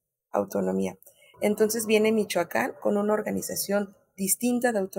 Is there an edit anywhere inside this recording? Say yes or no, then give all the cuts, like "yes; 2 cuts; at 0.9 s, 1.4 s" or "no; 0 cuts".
yes; 1 cut; at 1.3 s